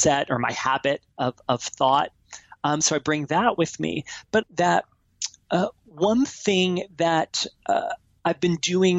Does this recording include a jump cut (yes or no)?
yes